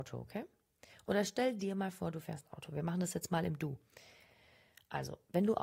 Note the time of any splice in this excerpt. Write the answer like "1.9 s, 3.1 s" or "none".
none